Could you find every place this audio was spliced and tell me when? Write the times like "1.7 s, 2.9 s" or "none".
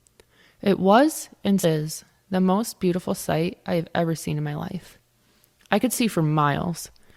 1.6 s